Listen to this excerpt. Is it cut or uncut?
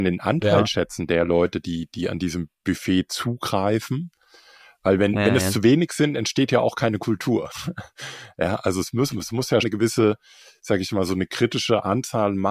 cut